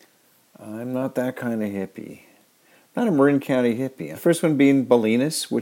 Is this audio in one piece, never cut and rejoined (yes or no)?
no